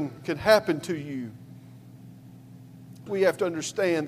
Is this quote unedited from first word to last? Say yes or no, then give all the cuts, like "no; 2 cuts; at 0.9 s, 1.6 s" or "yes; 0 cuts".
no; 1 cut; at 3.1 s